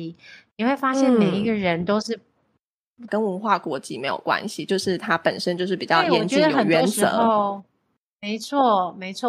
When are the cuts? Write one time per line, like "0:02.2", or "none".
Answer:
0:03.1